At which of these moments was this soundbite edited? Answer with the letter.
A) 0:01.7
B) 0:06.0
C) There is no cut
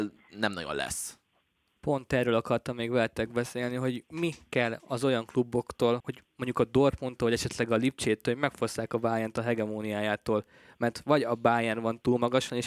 B